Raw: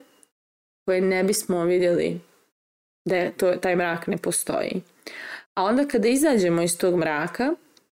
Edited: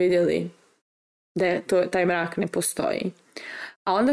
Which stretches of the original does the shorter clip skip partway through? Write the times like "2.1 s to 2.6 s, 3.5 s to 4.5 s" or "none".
none